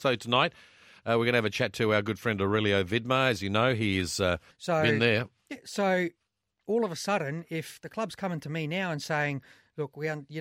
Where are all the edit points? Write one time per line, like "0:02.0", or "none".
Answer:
0:04.5